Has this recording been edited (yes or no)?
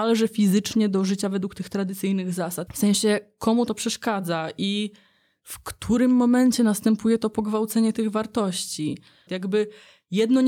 yes